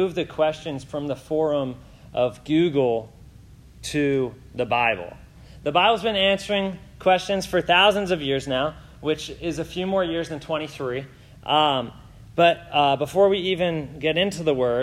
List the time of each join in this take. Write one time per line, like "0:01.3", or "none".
none